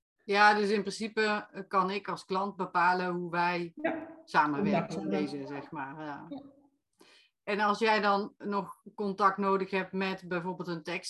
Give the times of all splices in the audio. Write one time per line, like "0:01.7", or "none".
none